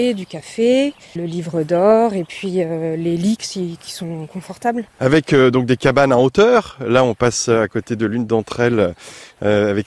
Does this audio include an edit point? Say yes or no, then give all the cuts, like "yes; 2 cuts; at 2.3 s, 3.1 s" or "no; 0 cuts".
yes; 1 cut; at 1.2 s